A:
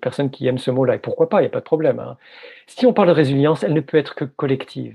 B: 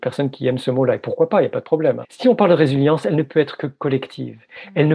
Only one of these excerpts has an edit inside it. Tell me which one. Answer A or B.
B